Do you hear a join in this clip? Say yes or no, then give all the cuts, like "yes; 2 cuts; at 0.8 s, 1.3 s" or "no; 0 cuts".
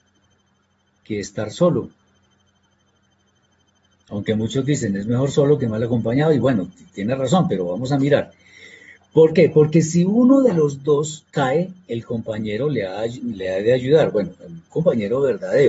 no; 0 cuts